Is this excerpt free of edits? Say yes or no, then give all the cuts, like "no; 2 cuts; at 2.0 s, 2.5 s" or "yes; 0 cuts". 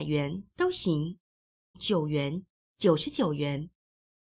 no; 1 cut; at 1.7 s